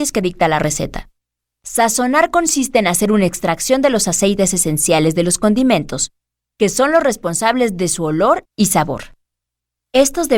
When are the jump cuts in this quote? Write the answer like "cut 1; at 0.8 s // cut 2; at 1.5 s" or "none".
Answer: cut 1; at 1.6 s